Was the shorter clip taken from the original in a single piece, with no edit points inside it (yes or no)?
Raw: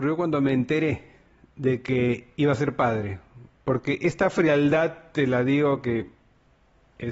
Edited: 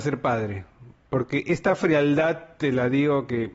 yes